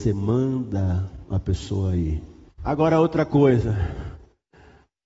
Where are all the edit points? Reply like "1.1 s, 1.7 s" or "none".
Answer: 2.5 s